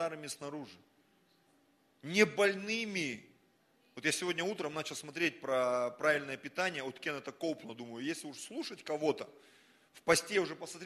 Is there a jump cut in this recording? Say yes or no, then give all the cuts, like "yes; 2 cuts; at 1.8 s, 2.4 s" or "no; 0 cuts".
no; 0 cuts